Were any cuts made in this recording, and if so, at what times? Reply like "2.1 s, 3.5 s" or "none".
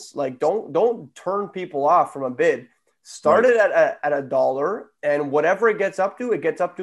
none

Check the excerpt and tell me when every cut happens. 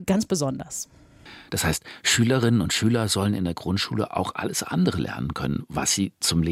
none

